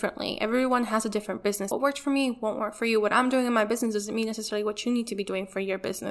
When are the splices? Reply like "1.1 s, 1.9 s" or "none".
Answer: 1.7 s